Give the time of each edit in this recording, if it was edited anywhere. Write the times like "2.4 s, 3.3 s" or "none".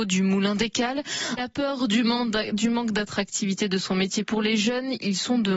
1.4 s